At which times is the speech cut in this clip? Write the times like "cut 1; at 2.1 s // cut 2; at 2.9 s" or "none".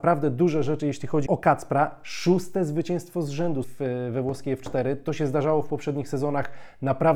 cut 1; at 1.3 s // cut 2; at 3.6 s